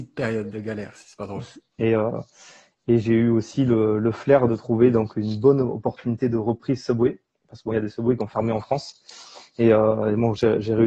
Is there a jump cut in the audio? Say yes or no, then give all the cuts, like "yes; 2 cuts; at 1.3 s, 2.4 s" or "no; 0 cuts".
yes; 1 cut; at 1.7 s